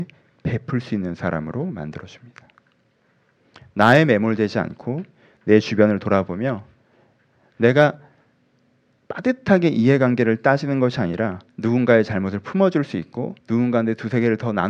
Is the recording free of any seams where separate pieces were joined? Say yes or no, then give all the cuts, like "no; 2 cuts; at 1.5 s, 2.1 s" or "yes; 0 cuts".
no; 2 cuts; at 11.5 s, 13.4 s